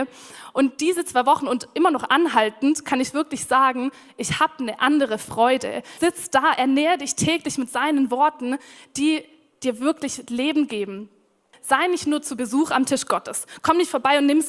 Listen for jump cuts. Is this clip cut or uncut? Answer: cut